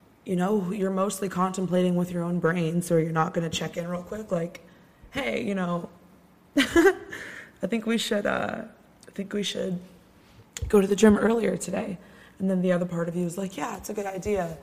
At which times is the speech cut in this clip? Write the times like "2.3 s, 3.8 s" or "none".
none